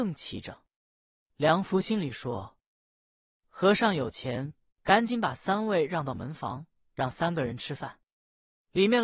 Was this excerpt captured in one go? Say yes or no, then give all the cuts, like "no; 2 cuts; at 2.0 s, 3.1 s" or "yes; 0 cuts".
no; 2 cuts; at 4.7 s, 6.9 s